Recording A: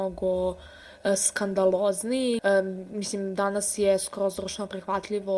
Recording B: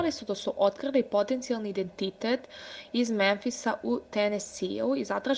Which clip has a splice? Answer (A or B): A